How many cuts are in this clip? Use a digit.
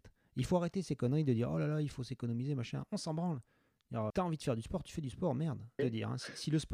2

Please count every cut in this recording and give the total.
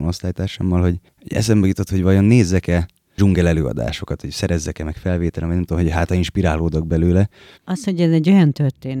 1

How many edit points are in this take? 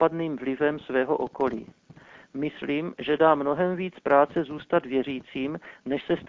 0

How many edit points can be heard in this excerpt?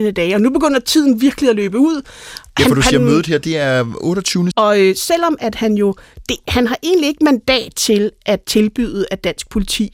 1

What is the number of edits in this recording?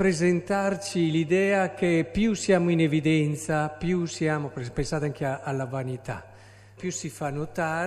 1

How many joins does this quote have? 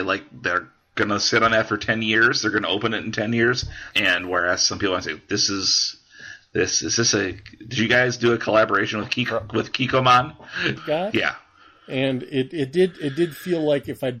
2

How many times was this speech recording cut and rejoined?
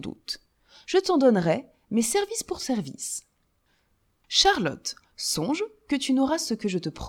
0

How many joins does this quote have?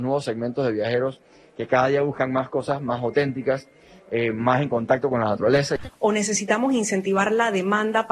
1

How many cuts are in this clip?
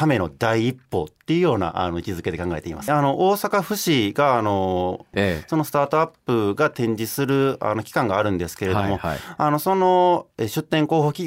2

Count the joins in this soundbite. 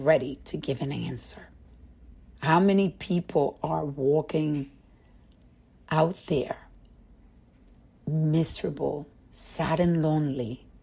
1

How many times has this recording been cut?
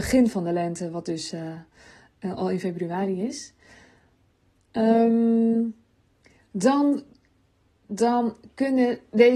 1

